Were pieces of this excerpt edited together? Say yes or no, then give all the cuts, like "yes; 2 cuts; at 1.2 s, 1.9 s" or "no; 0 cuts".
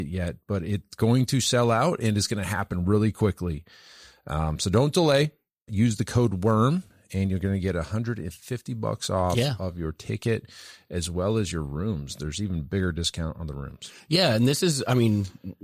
yes; 1 cut; at 5.7 s